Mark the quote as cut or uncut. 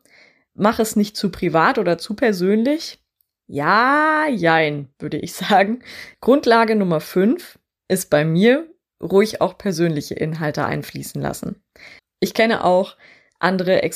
cut